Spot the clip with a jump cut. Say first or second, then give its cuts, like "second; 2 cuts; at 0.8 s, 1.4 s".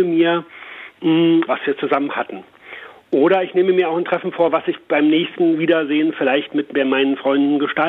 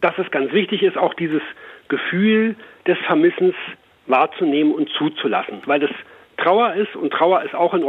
first; 1 cut; at 1.5 s